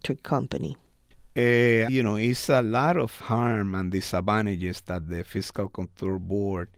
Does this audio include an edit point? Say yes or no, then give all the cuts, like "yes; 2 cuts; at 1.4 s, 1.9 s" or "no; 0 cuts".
yes; 1 cut; at 1.9 s